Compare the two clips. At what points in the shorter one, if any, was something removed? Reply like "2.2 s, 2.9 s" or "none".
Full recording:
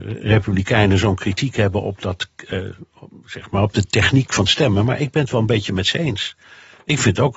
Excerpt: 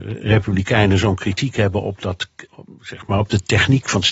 2.5 s